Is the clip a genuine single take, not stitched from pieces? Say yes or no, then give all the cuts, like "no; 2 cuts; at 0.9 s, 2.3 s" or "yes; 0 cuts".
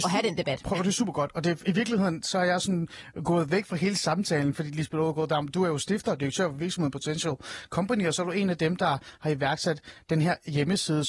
yes; 0 cuts